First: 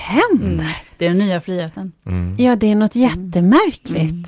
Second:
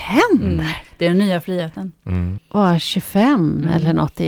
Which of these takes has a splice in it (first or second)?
second